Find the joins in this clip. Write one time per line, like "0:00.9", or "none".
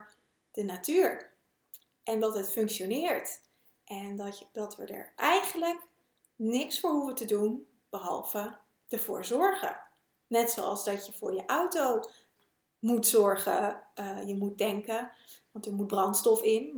none